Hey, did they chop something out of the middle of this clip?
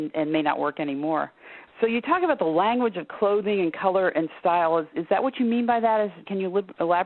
no; 0 cuts

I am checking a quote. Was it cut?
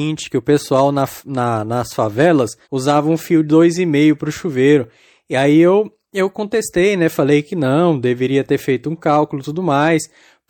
yes; 1 cut; at 2.6 s

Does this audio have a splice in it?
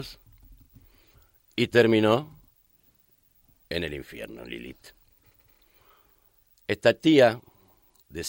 no; 0 cuts

